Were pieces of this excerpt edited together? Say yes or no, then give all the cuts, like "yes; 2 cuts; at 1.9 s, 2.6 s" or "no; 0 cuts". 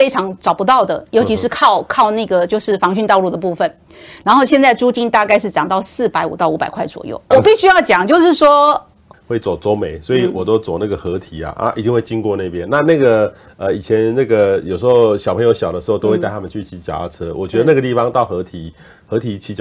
yes; 2 cuts; at 7.3 s, 9.1 s